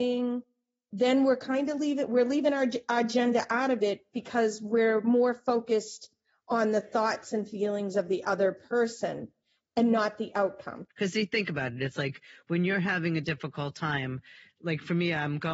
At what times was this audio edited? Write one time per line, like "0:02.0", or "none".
0:10.9